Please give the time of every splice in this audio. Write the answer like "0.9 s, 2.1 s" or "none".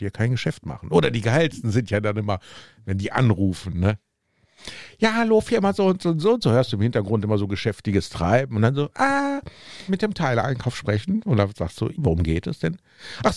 9.9 s, 11.9 s